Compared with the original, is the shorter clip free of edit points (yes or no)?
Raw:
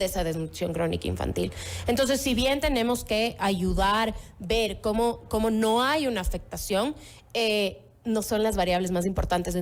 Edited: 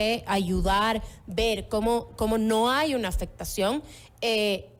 yes